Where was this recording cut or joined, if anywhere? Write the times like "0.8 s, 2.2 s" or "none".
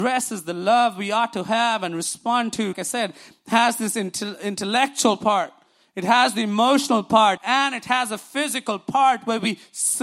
2.7 s, 7.4 s